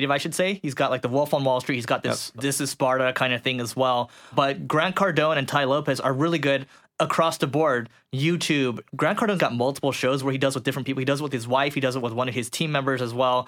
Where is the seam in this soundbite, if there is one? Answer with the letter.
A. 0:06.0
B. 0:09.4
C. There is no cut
B